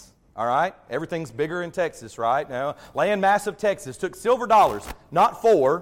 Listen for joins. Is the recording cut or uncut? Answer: uncut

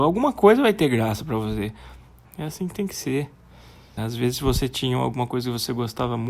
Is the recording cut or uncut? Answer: cut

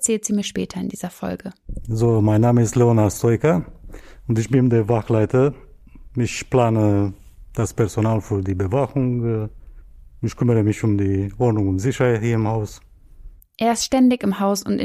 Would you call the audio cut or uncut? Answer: cut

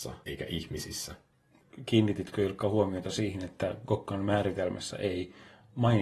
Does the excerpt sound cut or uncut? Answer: uncut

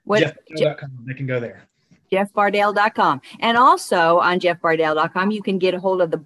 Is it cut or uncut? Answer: uncut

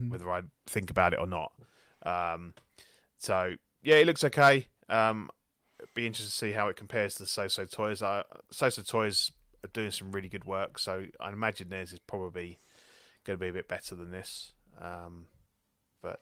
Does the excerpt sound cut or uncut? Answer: uncut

